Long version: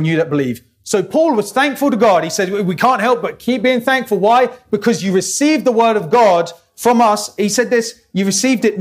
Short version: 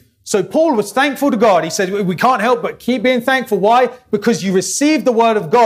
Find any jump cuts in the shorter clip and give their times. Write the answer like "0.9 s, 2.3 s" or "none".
none

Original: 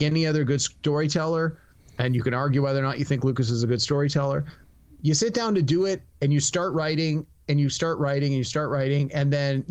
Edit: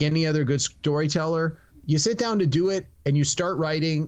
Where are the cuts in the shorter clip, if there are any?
1.7 s

